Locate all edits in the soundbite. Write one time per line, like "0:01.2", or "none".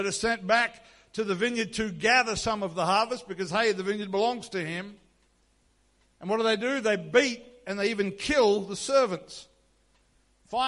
none